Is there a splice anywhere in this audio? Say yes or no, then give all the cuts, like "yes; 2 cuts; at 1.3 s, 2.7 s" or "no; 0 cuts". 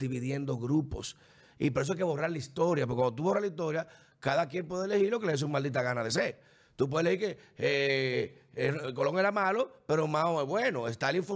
no; 0 cuts